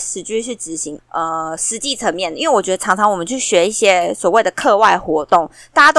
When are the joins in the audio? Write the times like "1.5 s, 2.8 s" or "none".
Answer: 1.0 s